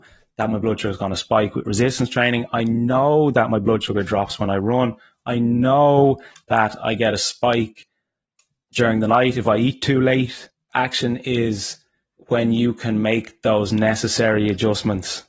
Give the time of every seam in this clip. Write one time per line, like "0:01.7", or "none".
0:10.7